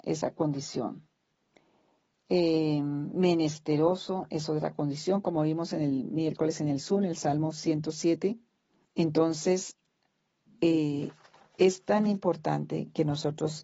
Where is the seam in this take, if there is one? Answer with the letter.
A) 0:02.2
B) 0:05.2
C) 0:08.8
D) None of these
C